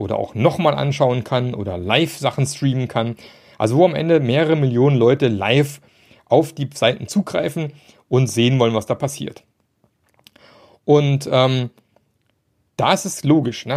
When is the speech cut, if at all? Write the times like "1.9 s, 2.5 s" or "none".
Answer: none